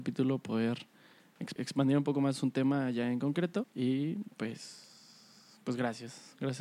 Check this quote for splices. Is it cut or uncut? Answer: cut